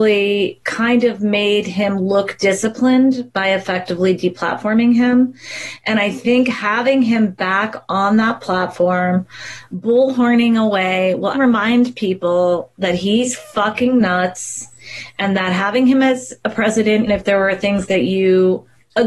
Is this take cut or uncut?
cut